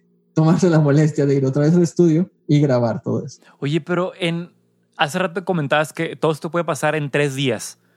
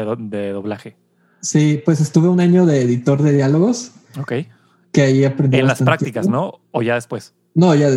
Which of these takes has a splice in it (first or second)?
first